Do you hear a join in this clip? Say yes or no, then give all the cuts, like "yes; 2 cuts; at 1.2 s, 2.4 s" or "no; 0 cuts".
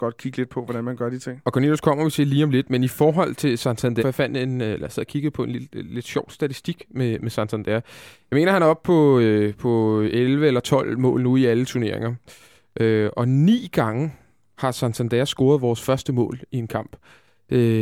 yes; 1 cut; at 4.0 s